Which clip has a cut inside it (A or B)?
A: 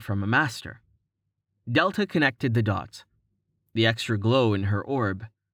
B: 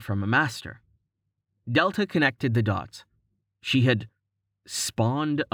B